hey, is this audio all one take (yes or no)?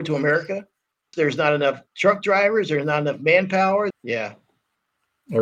no